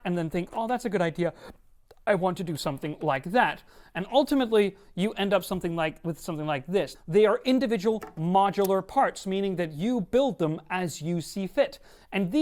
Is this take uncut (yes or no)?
no